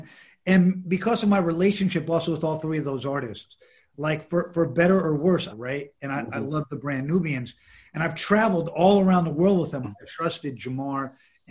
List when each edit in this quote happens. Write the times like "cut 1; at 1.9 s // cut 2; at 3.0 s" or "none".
cut 1; at 5.5 s // cut 2; at 9.8 s